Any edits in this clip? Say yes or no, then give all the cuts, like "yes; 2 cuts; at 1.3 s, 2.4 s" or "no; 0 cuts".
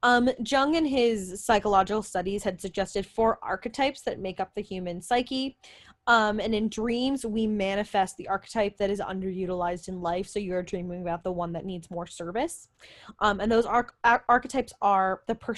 no; 0 cuts